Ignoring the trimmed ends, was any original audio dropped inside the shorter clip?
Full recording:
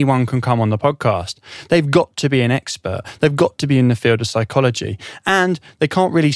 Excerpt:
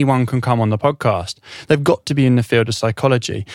yes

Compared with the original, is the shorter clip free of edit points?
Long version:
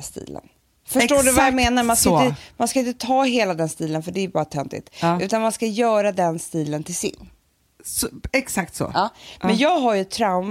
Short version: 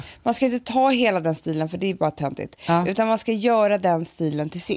yes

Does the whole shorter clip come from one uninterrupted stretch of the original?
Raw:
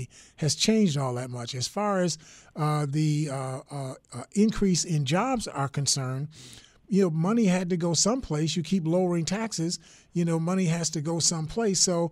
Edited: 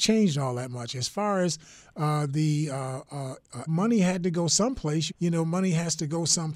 no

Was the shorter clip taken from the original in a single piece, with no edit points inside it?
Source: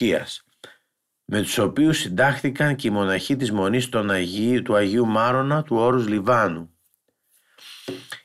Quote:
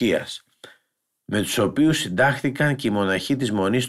yes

